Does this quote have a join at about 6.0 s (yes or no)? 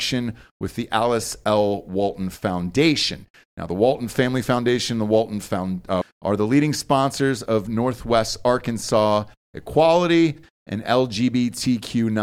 yes